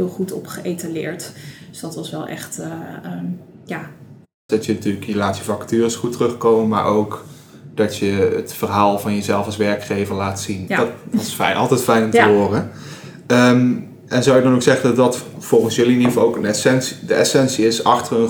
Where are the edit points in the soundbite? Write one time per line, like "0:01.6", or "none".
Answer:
0:04.5
0:10.7